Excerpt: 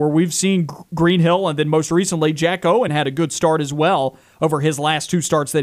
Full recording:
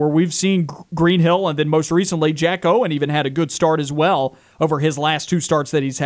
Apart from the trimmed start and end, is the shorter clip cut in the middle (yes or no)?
yes